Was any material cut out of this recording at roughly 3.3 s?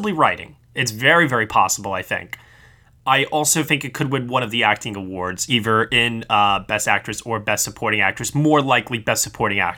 no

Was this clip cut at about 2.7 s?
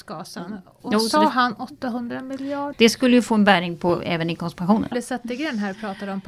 yes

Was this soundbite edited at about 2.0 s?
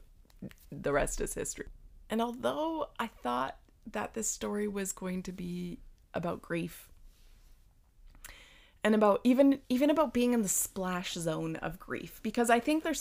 yes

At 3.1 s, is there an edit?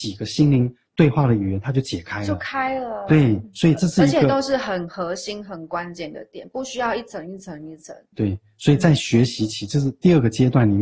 no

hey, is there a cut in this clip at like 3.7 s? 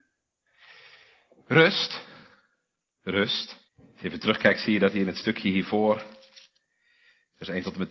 yes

